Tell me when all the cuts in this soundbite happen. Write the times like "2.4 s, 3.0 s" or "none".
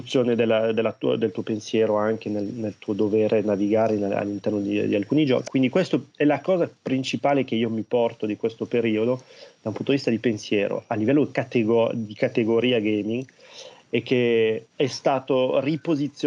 5.4 s, 14.7 s